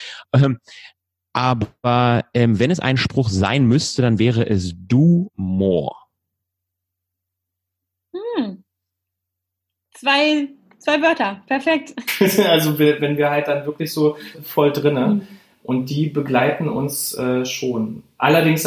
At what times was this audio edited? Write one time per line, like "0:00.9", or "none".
0:12.1
0:14.3